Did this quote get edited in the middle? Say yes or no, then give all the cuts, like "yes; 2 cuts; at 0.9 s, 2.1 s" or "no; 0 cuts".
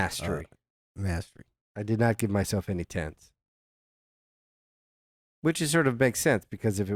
yes; 1 cut; at 1.6 s